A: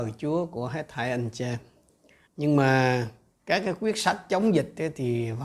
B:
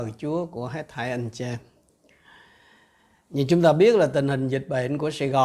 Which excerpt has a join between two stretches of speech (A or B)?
A